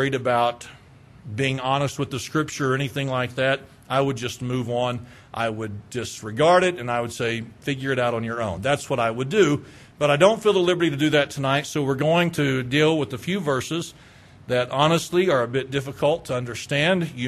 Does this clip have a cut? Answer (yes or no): no